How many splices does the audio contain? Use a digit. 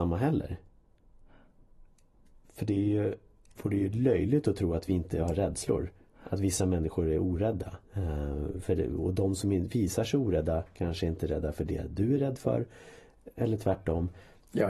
2